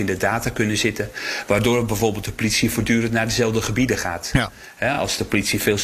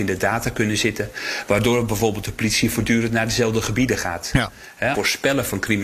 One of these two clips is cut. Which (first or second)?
second